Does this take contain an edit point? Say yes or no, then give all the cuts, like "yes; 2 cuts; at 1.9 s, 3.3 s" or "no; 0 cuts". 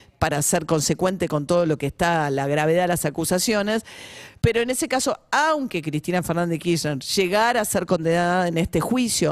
no; 0 cuts